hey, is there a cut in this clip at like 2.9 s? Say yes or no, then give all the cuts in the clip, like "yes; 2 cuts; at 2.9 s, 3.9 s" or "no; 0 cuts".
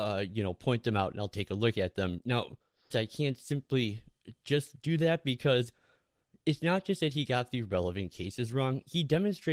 yes; 1 cut; at 2.9 s